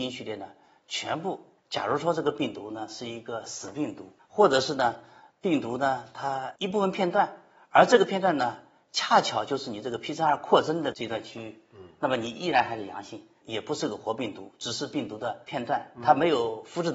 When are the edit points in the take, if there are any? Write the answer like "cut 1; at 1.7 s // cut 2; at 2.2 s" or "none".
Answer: cut 1; at 1.6 s // cut 2; at 13.4 s

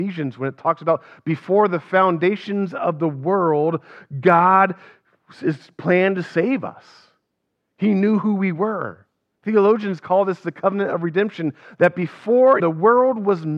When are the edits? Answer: cut 1; at 9.3 s // cut 2; at 12.6 s

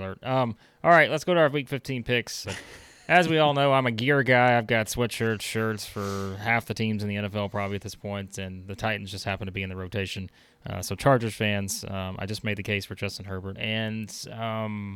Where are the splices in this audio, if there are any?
cut 1; at 2.4 s // cut 2; at 13.6 s

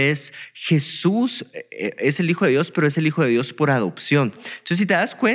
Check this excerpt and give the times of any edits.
cut 1; at 4.4 s

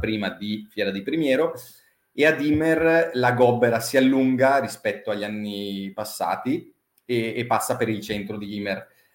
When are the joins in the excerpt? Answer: none

